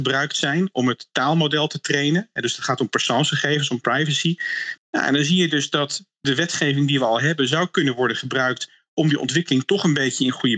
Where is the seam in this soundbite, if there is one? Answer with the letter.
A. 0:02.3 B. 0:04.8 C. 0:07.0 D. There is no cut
B